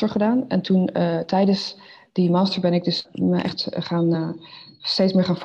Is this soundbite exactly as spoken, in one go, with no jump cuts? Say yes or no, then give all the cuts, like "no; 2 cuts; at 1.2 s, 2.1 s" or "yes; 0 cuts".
yes; 0 cuts